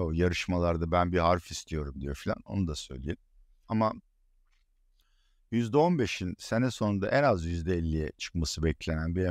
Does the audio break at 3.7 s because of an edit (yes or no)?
yes